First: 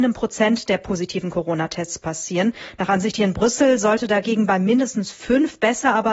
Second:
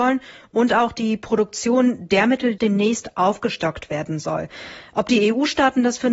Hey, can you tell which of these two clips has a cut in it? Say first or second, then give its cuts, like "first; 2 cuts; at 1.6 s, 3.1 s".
second; 1 cut; at 2.6 s